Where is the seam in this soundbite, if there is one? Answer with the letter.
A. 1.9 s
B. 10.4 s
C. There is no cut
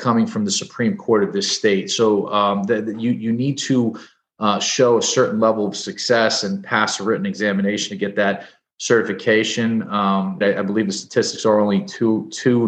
B